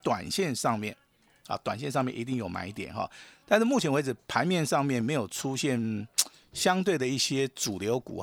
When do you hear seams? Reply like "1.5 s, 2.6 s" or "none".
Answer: none